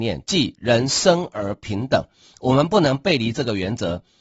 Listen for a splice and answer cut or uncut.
uncut